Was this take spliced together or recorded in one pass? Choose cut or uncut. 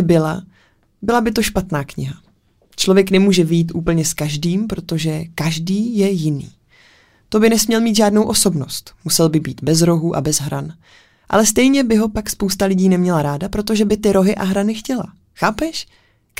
uncut